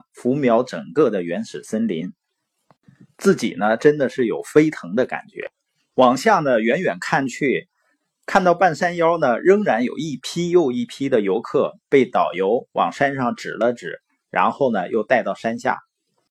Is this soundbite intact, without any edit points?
yes; 0 cuts

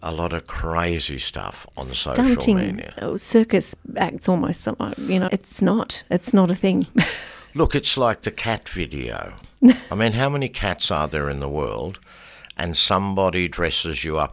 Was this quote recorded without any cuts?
no; 1 cut; at 5.3 s

